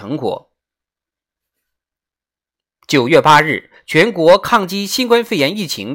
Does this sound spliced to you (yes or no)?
no